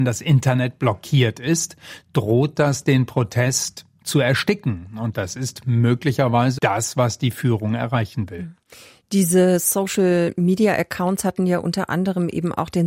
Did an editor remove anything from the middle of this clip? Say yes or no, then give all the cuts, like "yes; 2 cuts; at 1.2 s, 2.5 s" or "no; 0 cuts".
yes; 1 cut; at 6.6 s